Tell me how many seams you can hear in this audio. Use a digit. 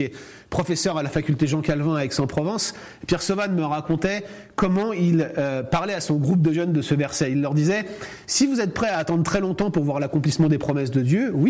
0